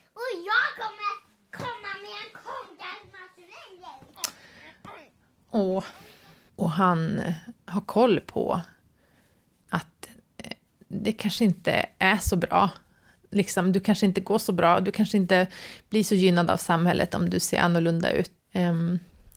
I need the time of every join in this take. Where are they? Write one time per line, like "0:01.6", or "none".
0:06.5
0:18.4